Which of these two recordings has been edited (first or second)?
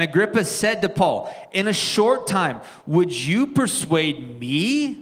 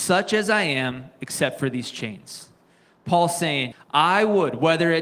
second